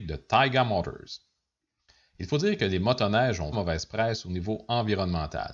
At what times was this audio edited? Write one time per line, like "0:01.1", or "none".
0:03.5

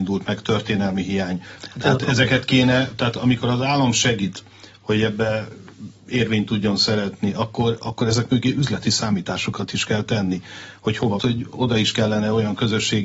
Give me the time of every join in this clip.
0:01.6
0:11.2

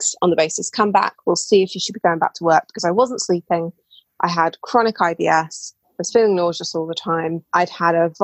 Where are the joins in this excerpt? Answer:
none

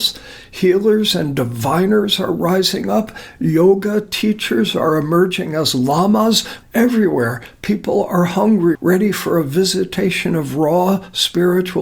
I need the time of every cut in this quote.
0:06.6
0:08.8

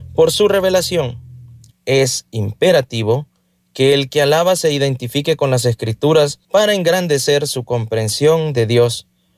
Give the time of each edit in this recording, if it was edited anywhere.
0:01.7
0:06.4

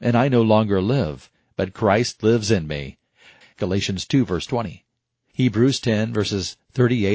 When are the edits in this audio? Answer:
0:03.4
0:05.3

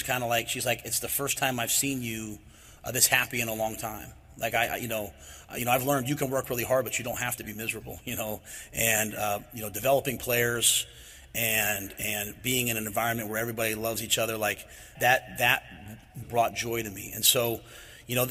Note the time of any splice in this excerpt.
0:15.0
0:16.2

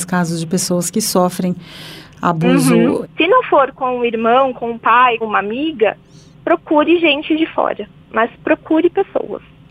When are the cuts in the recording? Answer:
0:03.0
0:05.2

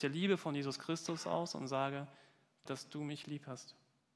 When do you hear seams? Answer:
0:02.7

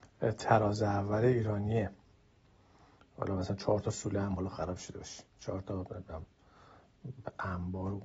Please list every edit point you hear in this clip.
none

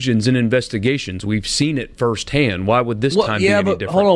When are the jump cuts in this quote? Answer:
none

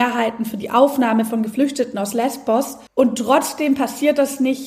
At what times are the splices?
0:02.9

